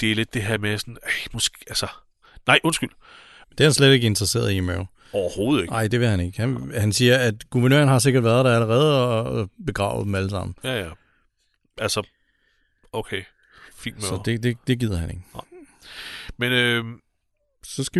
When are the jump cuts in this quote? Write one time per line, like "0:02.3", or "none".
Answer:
0:03.4